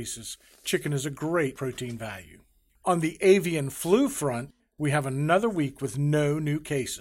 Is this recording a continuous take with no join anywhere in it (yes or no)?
yes